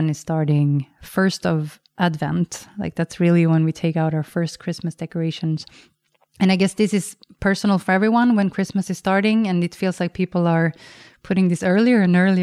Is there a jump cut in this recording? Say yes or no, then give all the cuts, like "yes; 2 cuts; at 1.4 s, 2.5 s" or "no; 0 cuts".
no; 0 cuts